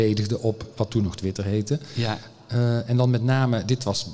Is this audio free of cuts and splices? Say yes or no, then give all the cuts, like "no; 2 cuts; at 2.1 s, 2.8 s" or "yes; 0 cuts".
yes; 0 cuts